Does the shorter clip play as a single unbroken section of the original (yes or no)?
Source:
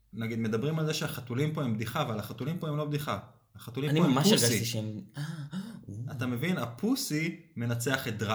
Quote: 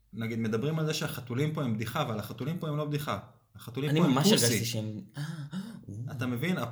yes